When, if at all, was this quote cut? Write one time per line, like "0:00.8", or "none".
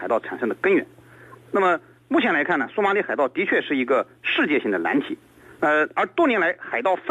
0:05.6